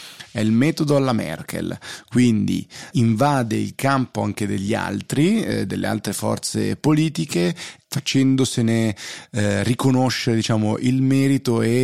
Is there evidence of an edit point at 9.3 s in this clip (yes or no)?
no